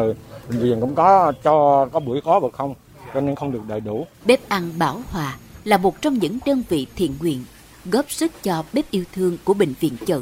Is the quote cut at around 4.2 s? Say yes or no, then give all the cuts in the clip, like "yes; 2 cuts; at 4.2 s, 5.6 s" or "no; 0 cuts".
yes; 1 cut; at 4.2 s